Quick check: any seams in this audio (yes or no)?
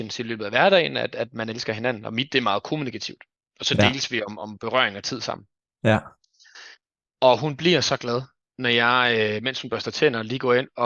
no